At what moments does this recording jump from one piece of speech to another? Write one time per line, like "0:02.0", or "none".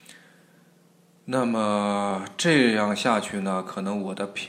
none

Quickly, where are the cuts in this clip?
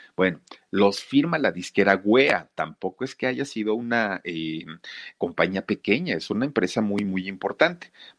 0:07.0

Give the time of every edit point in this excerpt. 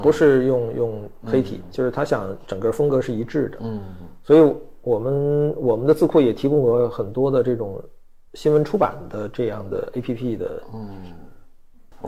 none

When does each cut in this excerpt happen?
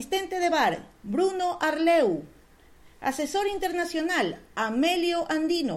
none

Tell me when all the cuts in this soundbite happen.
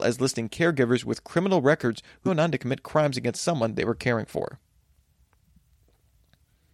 0:02.3

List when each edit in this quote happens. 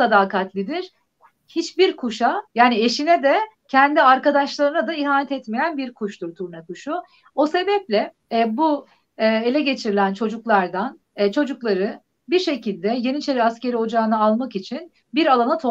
0:08.2
0:11.1

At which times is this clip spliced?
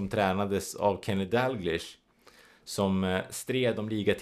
none

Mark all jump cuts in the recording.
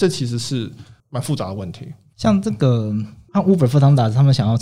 none

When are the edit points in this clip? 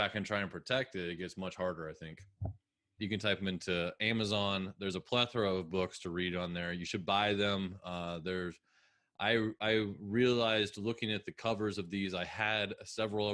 0:03.0

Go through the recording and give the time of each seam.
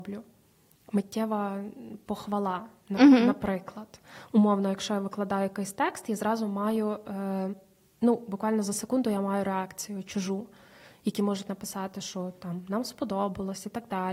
none

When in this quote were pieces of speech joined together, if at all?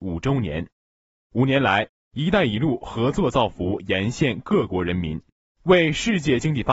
none

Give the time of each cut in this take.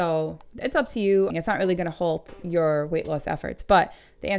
0:01.3

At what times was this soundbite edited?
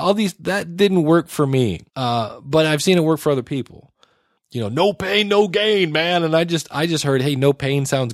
0:01.9
0:04.4

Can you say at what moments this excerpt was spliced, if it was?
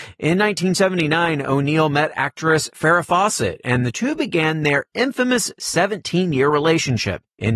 none

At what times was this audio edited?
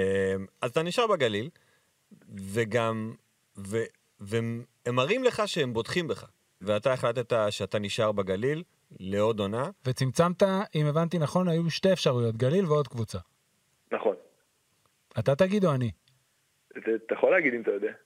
0:06.6

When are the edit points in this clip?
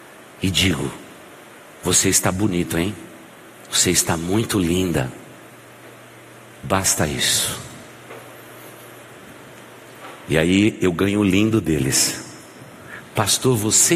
none

